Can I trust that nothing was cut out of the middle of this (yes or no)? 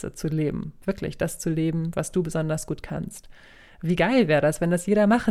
yes